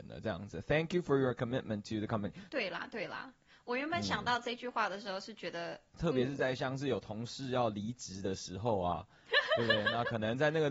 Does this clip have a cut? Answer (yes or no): yes